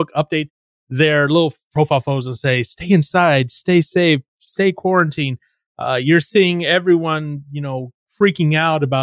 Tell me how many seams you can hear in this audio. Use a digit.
0